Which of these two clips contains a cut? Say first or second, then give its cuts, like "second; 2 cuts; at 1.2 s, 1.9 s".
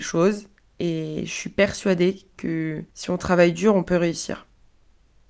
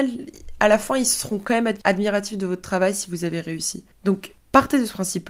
first; 1 cut; at 2.9 s